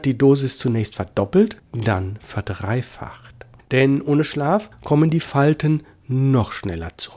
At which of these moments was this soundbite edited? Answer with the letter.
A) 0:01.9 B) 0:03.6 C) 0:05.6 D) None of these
D